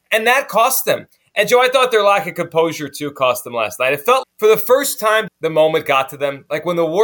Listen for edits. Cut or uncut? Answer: cut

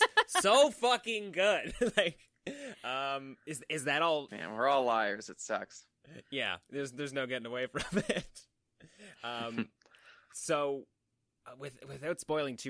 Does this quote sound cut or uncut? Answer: cut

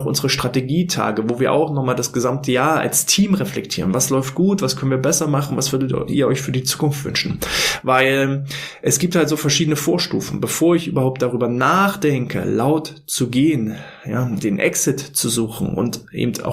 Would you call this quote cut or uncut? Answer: uncut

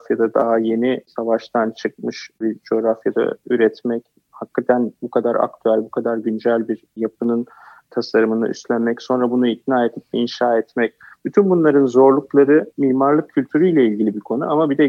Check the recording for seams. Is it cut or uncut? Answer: uncut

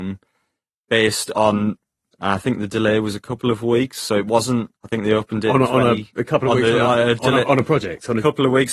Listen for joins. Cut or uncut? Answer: cut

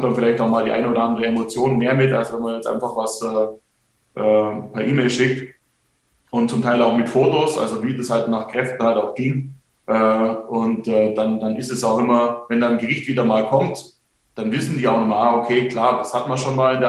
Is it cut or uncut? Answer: uncut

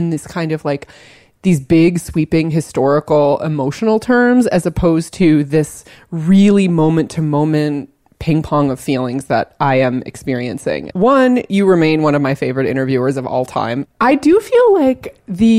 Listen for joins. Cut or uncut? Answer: cut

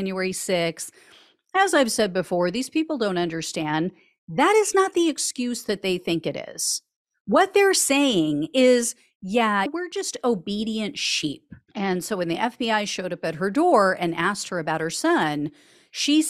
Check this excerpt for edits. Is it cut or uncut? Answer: cut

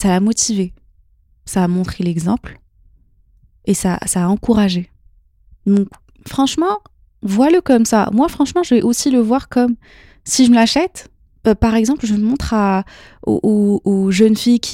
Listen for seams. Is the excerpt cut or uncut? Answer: uncut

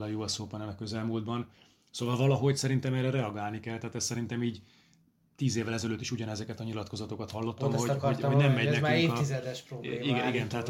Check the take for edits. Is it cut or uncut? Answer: uncut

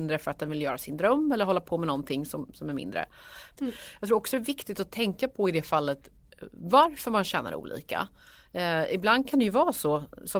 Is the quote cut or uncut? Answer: cut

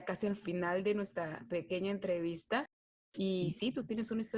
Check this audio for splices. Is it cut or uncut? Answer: uncut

